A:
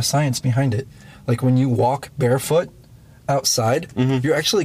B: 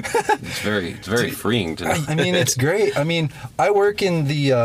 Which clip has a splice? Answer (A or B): B